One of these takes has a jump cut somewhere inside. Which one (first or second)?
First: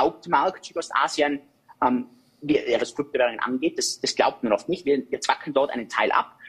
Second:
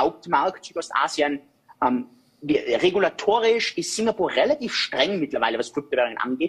first